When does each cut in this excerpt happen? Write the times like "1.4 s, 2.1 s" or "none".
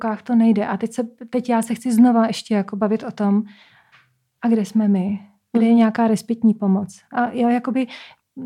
none